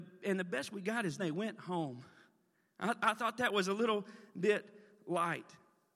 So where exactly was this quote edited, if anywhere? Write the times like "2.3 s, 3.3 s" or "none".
1.2 s